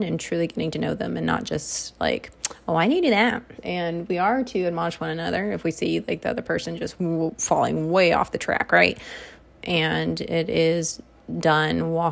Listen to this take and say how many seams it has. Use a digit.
2